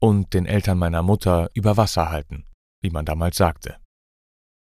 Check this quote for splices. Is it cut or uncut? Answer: uncut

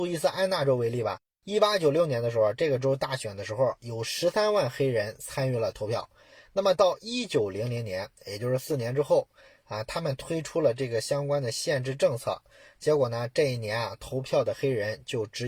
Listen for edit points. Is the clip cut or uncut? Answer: uncut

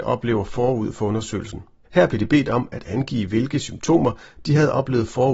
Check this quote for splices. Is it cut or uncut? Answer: cut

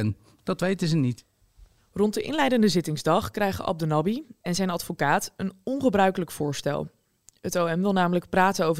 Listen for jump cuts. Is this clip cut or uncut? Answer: cut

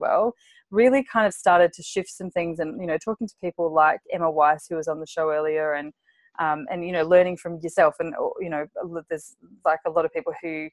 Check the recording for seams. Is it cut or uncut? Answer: uncut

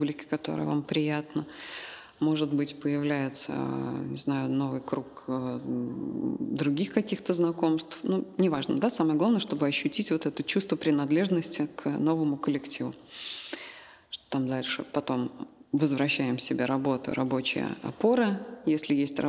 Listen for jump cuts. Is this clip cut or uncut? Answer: uncut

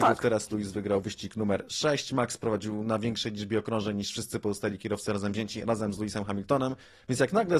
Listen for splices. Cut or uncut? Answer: uncut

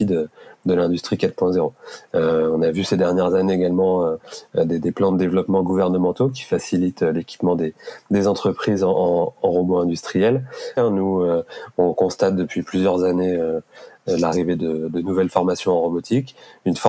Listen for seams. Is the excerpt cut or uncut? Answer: cut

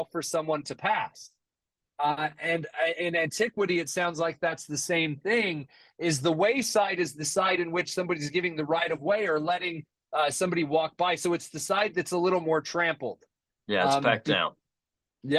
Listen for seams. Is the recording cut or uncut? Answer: uncut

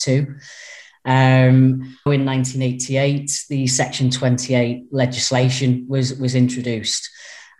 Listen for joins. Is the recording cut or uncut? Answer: cut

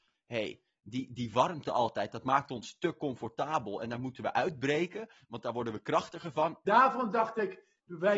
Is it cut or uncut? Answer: cut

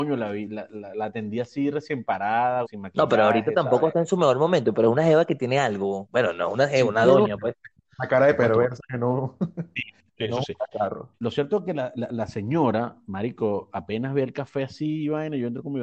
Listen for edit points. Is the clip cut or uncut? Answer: cut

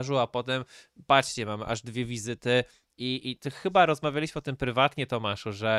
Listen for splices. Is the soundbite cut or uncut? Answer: cut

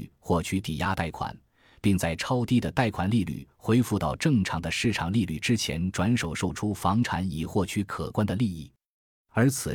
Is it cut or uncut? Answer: uncut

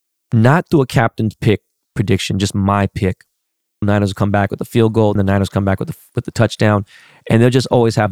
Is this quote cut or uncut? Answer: cut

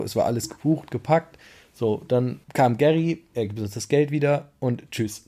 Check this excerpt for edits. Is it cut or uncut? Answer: cut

